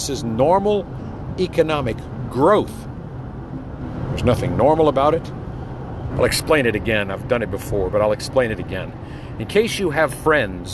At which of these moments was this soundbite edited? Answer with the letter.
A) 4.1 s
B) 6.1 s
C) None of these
B